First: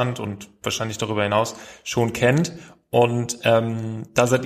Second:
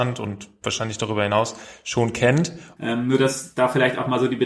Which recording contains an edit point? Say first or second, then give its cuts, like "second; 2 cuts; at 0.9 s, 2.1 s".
second; 1 cut; at 2.8 s